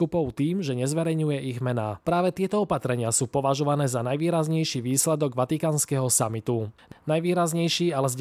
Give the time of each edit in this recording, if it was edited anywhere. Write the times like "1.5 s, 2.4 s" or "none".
2.0 s